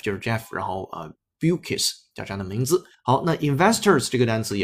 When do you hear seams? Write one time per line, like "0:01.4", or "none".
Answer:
0:02.9